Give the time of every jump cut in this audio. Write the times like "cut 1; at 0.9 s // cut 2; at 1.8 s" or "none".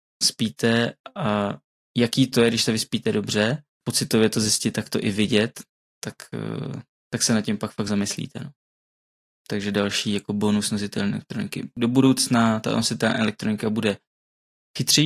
none